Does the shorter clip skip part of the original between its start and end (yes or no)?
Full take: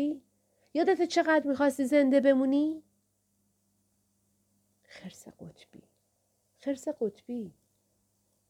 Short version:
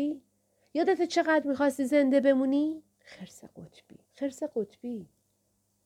yes